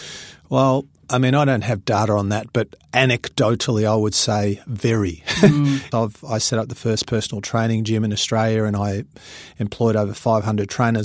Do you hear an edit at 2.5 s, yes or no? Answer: no